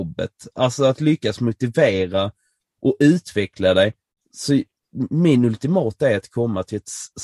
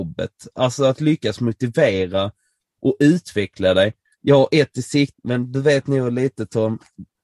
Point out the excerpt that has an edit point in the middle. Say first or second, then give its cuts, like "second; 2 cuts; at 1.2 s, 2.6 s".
second; 2 cuts; at 4.0 s, 5.1 s